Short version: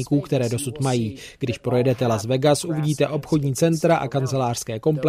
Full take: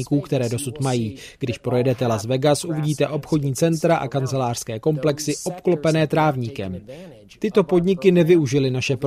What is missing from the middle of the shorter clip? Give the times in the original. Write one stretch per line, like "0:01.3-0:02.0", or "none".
none